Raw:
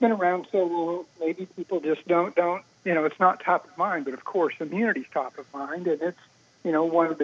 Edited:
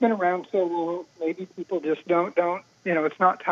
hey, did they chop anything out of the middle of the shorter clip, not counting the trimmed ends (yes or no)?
no